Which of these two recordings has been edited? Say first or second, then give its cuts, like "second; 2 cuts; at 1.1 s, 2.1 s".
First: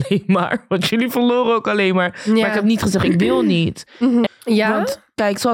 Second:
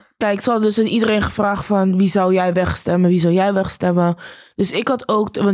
first; 1 cut; at 4.3 s